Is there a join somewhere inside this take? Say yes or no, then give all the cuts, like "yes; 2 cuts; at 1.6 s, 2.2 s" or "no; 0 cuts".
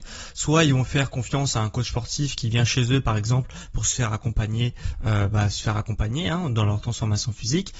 no; 0 cuts